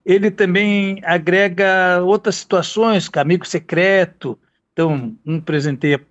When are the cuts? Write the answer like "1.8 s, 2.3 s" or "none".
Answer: none